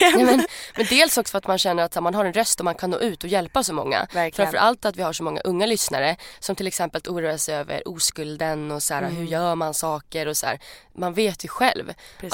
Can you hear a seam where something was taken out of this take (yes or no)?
no